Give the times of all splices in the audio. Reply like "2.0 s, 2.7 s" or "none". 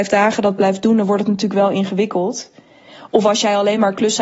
none